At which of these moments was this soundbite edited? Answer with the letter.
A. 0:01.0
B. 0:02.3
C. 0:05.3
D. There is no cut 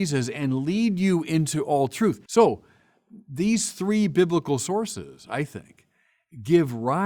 B